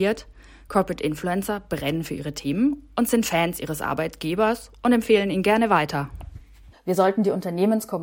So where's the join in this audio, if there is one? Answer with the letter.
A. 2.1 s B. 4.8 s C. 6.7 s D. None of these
C